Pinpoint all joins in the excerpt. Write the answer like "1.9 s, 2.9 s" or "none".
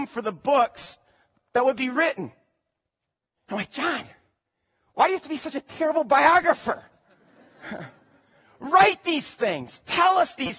3.3 s